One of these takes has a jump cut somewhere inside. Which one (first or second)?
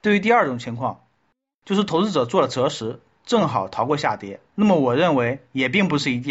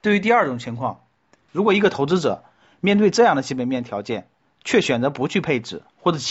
second